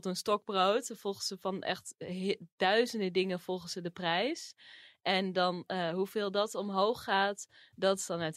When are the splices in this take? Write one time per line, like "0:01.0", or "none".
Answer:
none